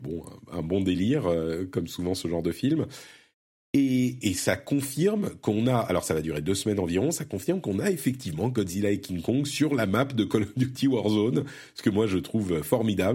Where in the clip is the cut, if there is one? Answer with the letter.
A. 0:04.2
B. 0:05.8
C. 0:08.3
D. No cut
A